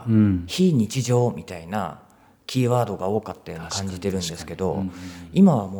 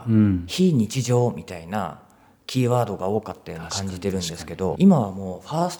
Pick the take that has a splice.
second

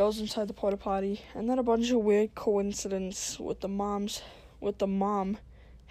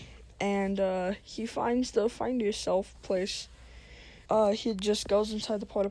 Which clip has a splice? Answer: second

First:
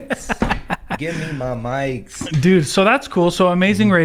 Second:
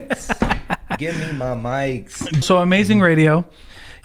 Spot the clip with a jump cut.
second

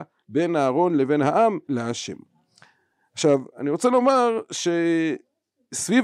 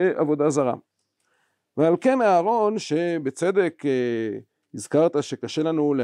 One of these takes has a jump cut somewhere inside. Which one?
first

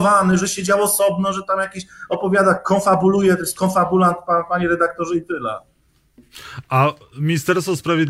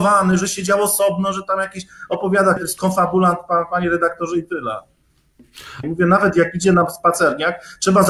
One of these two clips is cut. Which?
second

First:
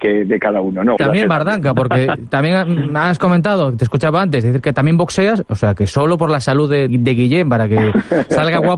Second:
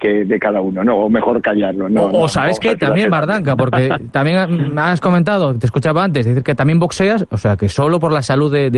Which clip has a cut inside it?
first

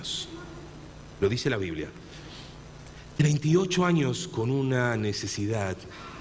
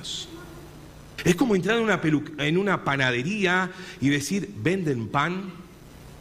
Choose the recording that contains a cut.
second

